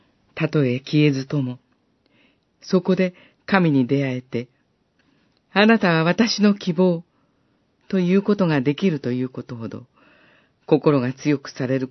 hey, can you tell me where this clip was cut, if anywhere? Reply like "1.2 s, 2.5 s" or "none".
5.4 s